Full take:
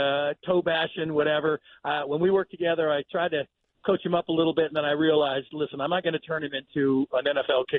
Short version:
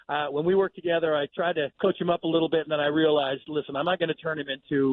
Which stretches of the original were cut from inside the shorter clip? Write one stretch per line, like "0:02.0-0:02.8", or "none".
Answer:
0:03.5-0:03.8